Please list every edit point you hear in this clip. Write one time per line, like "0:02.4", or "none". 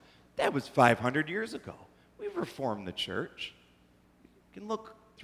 0:04.0